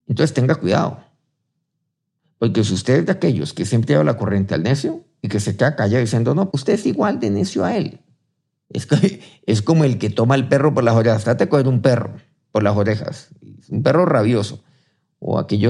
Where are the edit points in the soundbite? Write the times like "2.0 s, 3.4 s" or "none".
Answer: 6.5 s, 8.6 s